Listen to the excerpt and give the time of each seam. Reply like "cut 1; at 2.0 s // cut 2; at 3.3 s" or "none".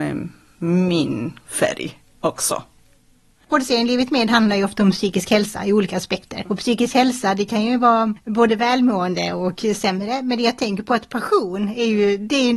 none